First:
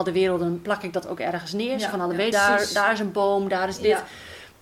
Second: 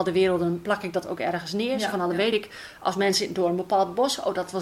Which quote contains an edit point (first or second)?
first